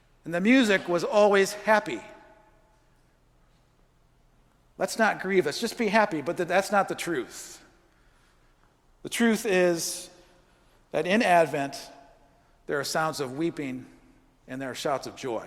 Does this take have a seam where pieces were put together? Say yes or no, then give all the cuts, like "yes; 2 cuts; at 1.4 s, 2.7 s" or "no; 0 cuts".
no; 0 cuts